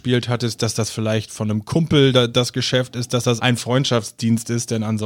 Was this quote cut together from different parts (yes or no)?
yes